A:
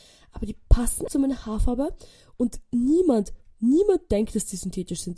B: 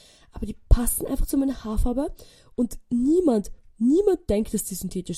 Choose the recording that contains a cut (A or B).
A